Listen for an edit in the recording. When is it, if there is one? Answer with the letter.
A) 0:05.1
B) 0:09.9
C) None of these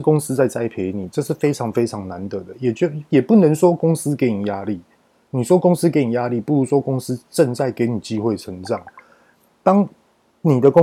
C